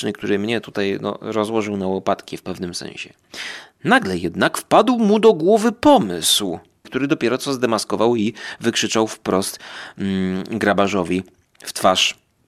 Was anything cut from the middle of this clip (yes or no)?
yes